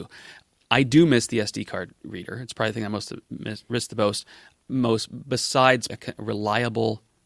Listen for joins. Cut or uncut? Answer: cut